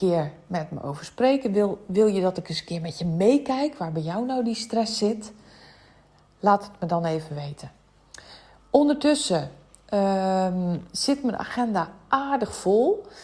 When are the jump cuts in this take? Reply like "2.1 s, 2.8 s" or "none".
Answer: none